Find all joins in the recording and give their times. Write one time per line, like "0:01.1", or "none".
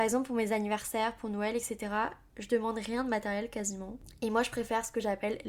none